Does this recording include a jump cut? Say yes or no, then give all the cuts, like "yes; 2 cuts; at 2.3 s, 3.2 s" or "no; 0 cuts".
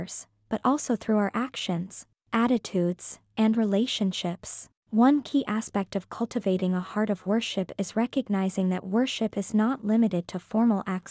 yes; 1 cut; at 4.8 s